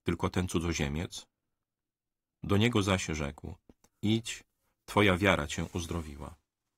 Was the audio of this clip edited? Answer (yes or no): yes